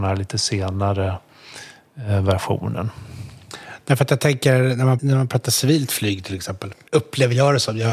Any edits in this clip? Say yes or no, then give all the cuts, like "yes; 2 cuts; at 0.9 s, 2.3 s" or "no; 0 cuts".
yes; 2 cuts; at 5.0 s, 6.9 s